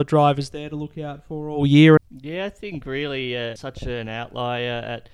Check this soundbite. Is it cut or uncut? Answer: cut